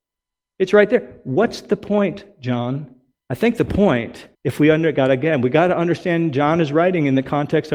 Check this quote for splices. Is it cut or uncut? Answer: cut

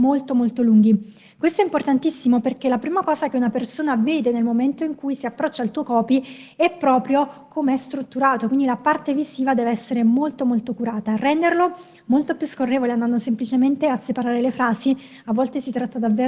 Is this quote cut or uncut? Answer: uncut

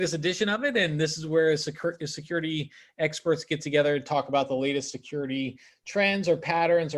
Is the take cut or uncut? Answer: uncut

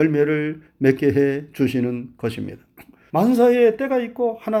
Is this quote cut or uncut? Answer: cut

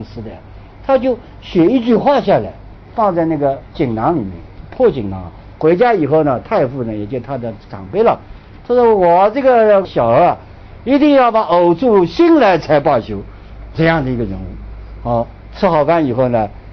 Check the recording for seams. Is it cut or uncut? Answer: cut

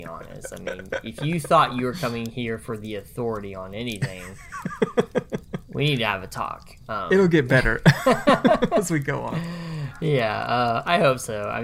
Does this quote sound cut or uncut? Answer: uncut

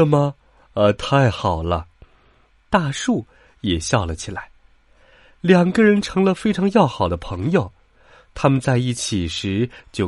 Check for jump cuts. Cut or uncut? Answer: uncut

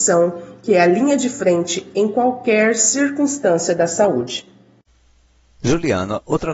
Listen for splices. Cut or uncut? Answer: uncut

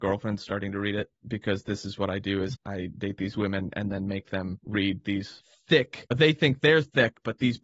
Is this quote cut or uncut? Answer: uncut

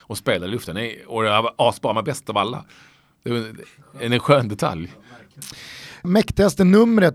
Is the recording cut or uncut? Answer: cut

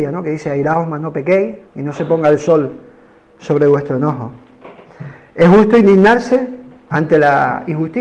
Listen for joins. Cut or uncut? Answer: cut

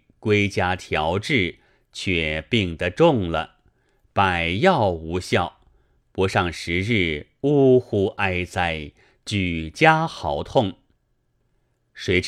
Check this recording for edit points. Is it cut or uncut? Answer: uncut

